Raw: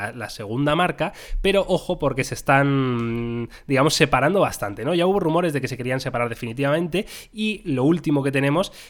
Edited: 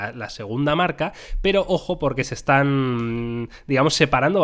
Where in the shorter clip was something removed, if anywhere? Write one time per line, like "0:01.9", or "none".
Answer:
none